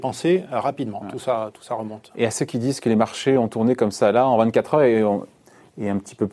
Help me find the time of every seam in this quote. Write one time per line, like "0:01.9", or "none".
0:01.0